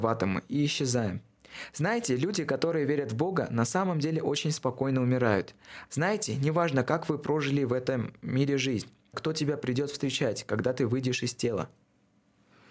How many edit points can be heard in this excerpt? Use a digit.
2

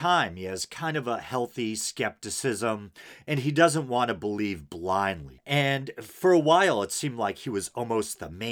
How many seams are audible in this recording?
1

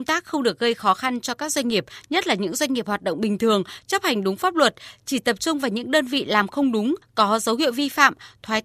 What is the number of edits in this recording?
0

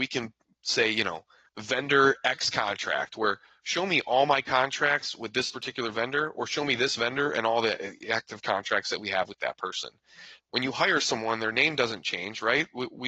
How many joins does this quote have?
2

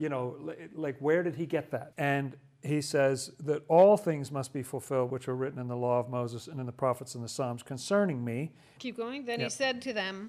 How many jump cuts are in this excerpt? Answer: 2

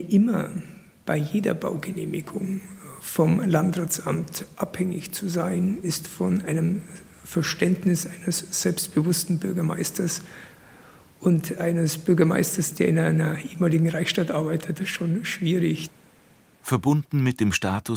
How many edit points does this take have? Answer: 0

